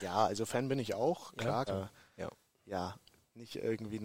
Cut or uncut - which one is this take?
cut